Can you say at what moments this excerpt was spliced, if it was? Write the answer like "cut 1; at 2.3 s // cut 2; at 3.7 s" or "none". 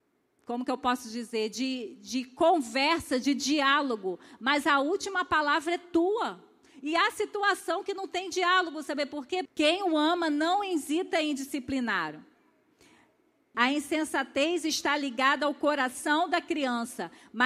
cut 1; at 9.5 s // cut 2; at 13.5 s

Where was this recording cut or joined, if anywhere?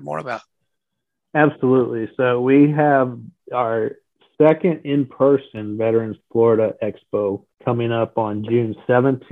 cut 1; at 7.5 s

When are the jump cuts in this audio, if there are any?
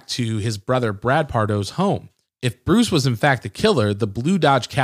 none

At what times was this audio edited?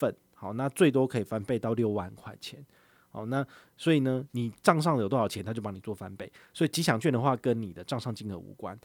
cut 1; at 4.3 s

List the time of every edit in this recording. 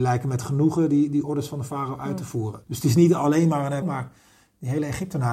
cut 1; at 2.6 s // cut 2; at 3.8 s

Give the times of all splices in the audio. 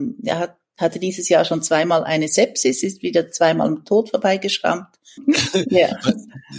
cut 1; at 5.2 s

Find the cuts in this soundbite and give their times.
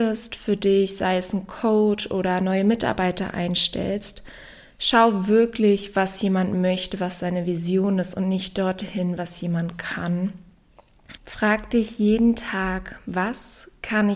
cut 1; at 11.2 s

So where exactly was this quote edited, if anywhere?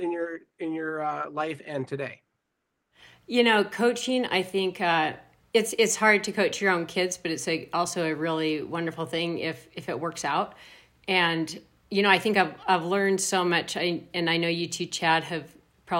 none

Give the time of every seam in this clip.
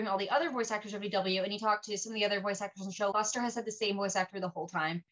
cut 1; at 3.1 s

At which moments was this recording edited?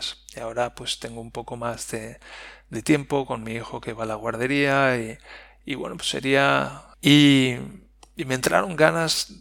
cut 1; at 6.9 s

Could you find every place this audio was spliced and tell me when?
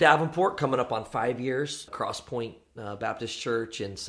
cut 1; at 1.9 s

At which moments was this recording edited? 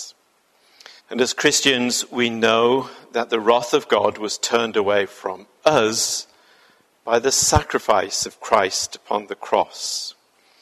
cut 1; at 1.0 s

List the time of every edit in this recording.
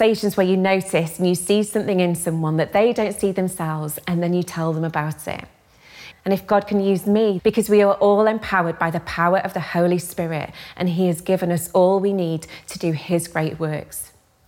cut 1; at 6.1 s // cut 2; at 7.4 s

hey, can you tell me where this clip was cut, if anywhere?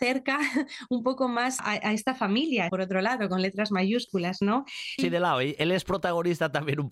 cut 1; at 1.6 s // cut 2; at 2.7 s // cut 3; at 5.0 s

